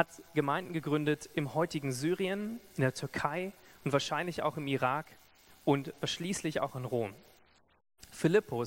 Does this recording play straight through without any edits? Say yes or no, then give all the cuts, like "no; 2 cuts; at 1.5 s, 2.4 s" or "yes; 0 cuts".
yes; 0 cuts